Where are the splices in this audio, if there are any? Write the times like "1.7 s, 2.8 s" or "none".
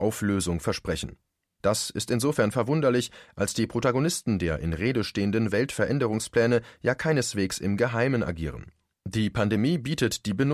1.6 s, 8.9 s